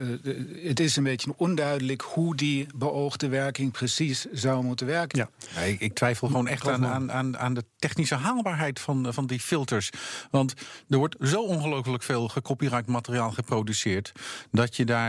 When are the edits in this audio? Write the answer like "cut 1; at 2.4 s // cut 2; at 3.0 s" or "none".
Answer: cut 1; at 5.1 s